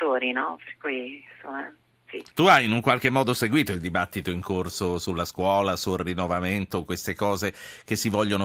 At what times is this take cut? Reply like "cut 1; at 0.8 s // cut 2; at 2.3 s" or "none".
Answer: cut 1; at 2.3 s